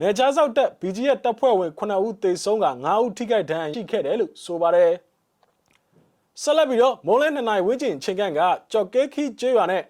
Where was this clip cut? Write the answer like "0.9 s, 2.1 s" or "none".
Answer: 3.7 s